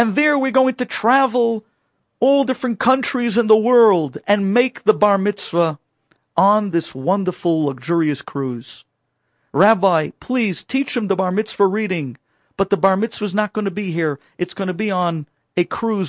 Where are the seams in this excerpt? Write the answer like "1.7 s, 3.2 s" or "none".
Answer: none